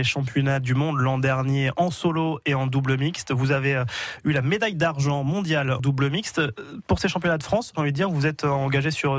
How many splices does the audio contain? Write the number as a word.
two